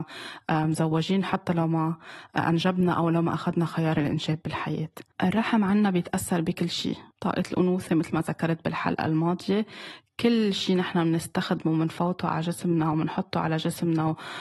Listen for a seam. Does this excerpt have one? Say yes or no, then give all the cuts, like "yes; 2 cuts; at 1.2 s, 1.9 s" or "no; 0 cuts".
yes; 2 cuts; at 5.1 s, 7.1 s